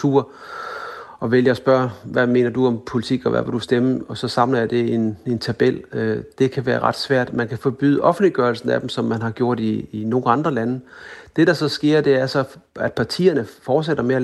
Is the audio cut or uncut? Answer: uncut